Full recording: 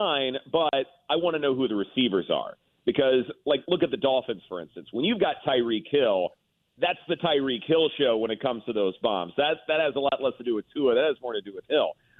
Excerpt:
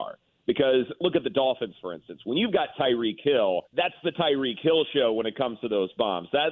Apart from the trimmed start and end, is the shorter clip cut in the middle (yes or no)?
yes